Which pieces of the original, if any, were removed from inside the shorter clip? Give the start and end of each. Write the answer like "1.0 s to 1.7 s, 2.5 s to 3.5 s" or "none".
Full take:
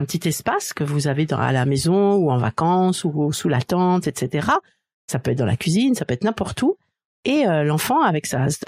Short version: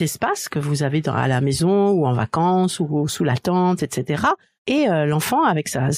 4.8 s to 7.1 s